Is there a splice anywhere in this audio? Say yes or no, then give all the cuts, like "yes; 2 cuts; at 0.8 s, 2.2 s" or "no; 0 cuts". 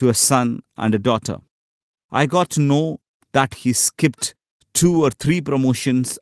no; 0 cuts